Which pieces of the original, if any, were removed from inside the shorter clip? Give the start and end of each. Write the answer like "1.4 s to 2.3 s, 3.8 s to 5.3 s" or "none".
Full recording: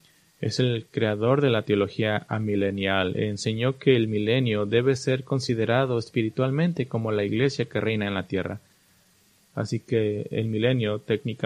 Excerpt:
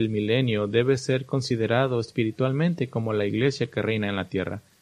none

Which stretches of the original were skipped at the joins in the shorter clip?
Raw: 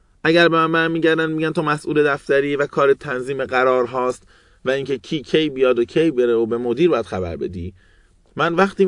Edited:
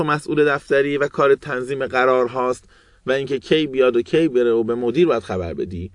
5.0 s to 5.2 s

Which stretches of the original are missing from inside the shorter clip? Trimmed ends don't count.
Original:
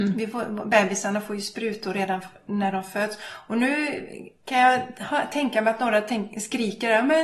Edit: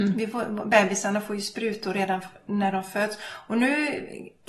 none

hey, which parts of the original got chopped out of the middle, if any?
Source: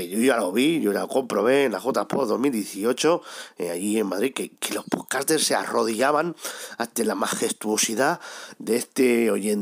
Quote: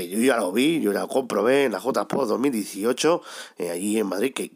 none

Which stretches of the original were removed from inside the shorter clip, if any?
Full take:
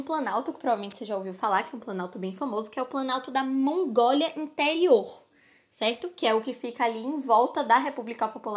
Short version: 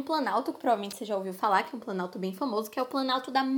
none

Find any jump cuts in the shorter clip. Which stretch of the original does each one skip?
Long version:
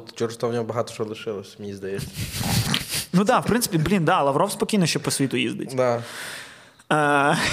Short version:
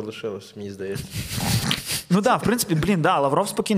none

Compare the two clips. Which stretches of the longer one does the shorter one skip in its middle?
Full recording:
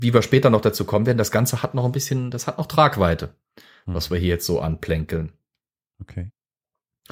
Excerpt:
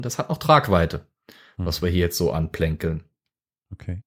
none

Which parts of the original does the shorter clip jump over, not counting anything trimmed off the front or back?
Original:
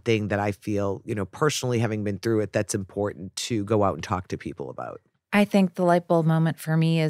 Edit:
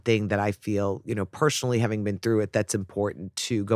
none

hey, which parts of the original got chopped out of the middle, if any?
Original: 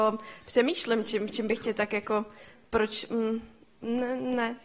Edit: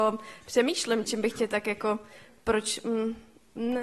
1.0 s to 1.3 s

